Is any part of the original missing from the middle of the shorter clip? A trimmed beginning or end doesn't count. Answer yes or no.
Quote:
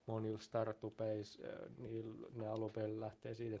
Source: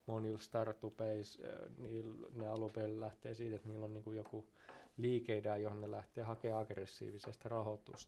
no